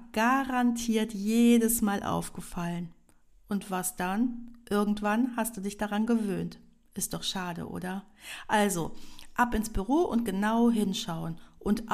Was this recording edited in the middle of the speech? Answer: no; 0 cuts

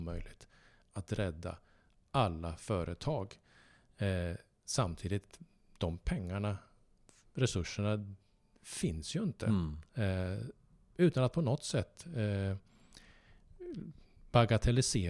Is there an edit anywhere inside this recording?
no; 0 cuts

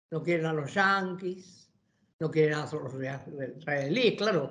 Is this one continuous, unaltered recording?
yes; 0 cuts

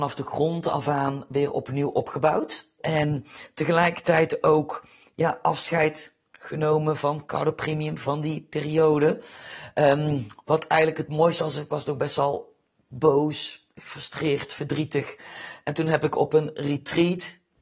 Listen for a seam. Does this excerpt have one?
yes; 1 cut; at 2.8 s

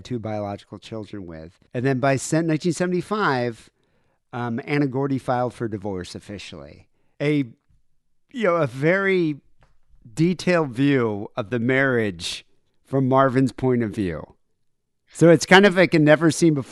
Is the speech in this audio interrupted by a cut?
yes; 2 cuts; at 1.7 s, 7.1 s

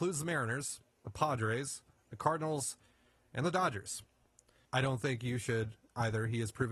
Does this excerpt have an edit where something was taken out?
yes; 1 cut; at 4.7 s

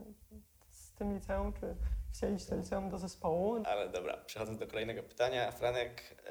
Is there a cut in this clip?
yes; 1 cut; at 3.6 s

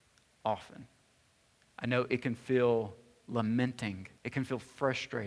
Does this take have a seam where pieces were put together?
yes; 1 cut; at 4.2 s

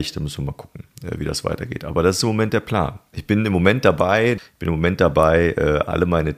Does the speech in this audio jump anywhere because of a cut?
yes; 2 cuts; at 3.1 s, 4.4 s

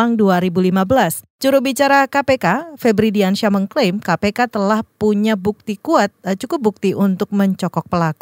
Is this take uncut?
no; 1 cut; at 1.3 s

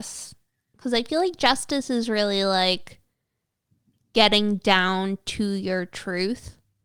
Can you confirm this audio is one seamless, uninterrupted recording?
yes; 0 cuts

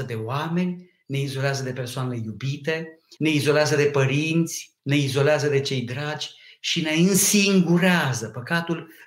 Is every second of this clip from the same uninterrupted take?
no; 2 cuts; at 3.2 s, 4.8 s

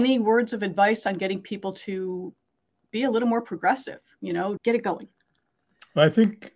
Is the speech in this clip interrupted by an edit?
yes; 1 cut; at 4.6 s

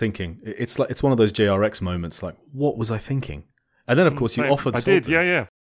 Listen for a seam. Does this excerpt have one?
yes; 1 cut; at 4.7 s

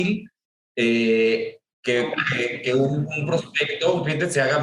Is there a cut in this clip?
no; 0 cuts

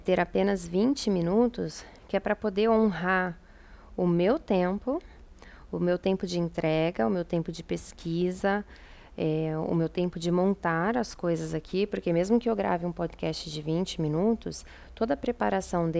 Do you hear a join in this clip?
no; 0 cuts

